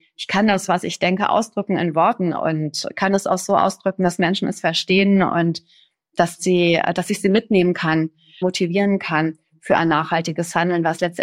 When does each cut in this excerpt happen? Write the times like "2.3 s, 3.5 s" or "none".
8.4 s